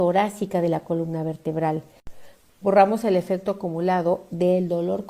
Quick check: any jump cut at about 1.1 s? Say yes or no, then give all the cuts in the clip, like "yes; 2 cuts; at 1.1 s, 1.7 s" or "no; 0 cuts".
no; 1 cut; at 2.5 s